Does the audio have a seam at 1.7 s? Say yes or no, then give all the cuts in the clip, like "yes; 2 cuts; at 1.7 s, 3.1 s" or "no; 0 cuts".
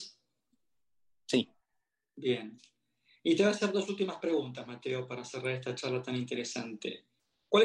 no; 0 cuts